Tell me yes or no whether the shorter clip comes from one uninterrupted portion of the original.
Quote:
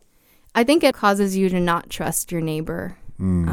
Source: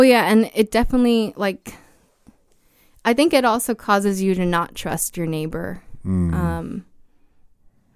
no